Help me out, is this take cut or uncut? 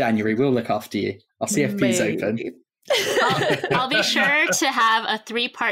uncut